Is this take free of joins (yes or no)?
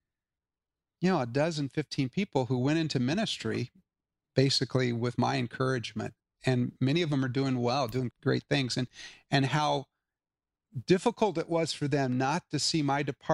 no